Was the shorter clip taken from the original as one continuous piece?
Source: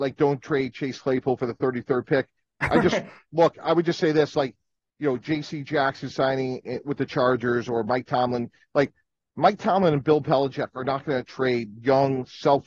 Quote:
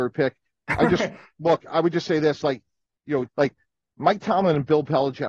no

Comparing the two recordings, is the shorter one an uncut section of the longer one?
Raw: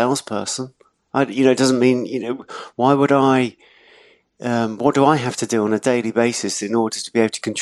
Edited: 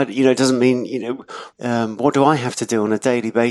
no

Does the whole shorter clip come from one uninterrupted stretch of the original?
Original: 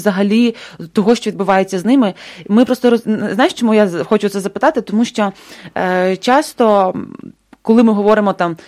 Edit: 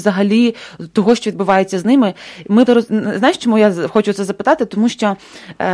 no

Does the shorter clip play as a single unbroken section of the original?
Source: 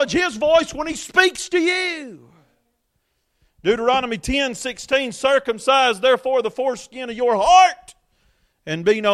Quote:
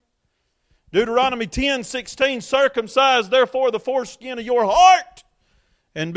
yes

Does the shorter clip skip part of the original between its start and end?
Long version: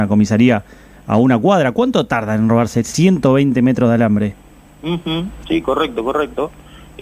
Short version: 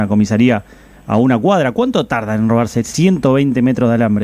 no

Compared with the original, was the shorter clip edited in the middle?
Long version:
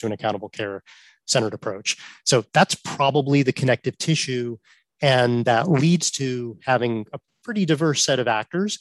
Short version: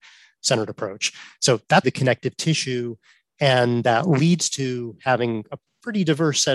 yes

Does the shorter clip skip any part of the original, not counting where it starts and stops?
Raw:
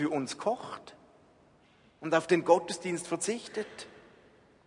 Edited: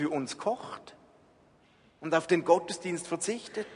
no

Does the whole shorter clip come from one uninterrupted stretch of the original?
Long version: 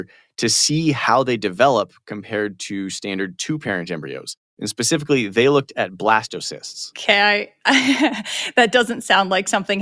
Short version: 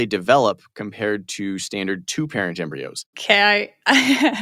no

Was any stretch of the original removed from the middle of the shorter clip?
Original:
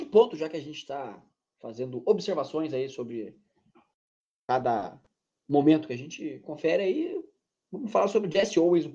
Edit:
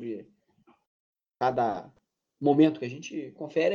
no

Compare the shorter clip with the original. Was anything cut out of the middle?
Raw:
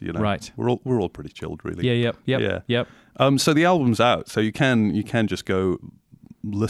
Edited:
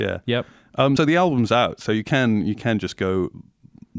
yes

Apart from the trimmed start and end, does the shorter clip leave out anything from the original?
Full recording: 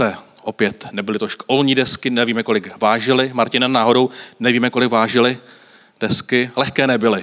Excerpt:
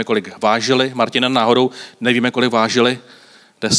no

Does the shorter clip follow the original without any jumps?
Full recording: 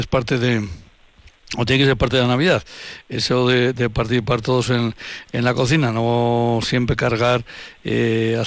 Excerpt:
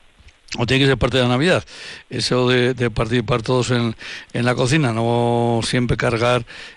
yes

